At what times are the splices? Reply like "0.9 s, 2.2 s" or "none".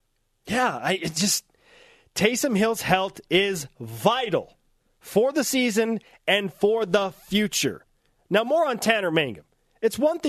none